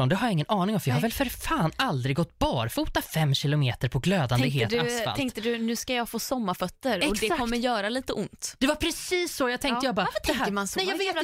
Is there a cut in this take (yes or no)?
no